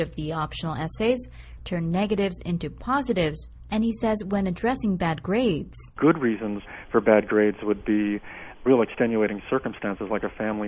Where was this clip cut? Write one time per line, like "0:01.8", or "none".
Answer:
0:01.6